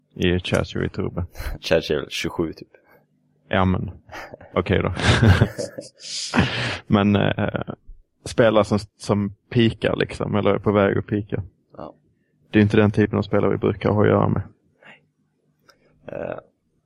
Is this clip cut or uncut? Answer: uncut